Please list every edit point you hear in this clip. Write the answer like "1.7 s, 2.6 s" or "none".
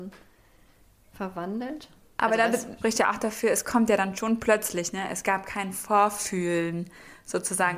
2.8 s